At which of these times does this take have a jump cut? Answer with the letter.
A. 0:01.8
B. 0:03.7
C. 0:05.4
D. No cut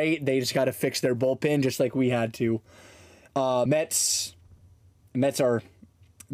D